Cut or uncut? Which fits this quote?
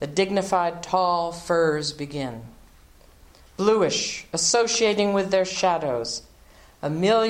uncut